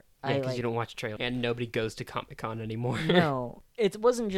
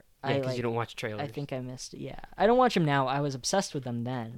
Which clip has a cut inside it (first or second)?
first